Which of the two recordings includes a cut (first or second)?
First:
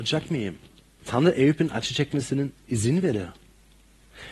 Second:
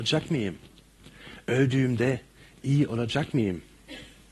first